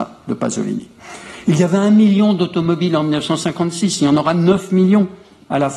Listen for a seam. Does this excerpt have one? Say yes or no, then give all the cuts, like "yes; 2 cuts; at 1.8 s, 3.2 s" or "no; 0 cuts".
no; 0 cuts